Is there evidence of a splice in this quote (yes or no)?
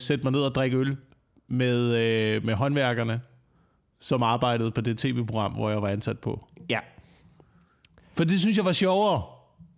no